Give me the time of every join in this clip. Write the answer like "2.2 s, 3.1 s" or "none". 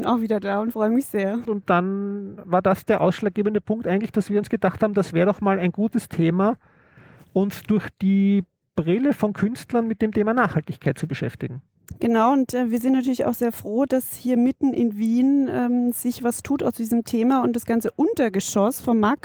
1.5 s

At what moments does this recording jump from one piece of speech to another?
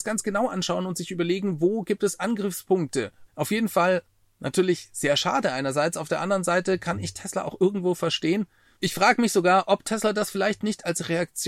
3.3 s, 8.8 s

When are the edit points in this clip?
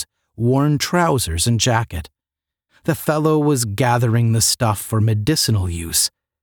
2.7 s

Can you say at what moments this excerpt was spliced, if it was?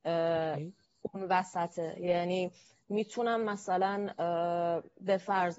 none

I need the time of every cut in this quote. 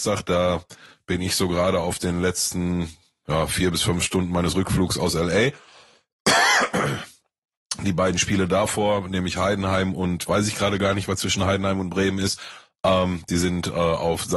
none

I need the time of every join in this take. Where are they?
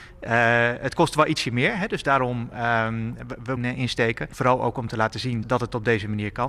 3.6 s, 5.4 s

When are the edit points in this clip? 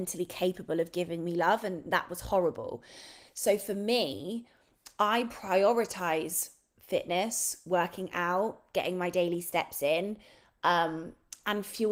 none

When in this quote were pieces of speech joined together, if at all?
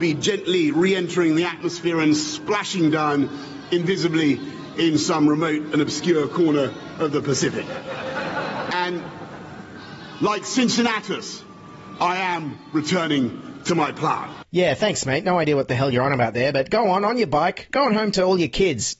17.7 s

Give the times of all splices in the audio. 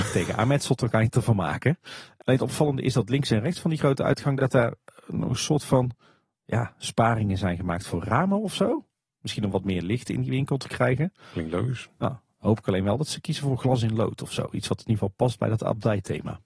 none

